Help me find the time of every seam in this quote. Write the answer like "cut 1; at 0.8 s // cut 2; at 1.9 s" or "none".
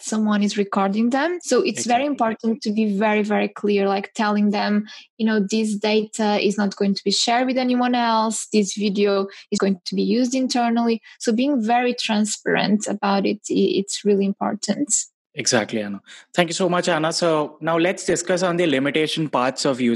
cut 1; at 9.6 s